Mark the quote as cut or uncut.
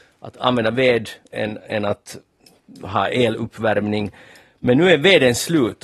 cut